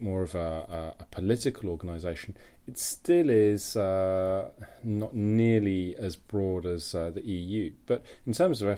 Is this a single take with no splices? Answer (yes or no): yes